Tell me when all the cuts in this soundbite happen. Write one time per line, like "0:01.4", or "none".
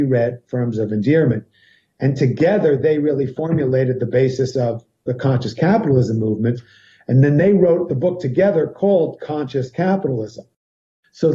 none